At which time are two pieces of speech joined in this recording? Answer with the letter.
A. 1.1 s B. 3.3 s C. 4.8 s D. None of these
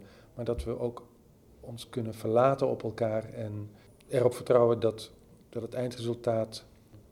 D